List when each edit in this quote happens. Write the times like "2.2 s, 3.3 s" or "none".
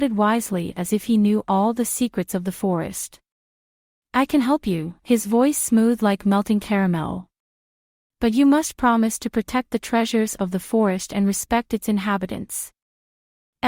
5.0 s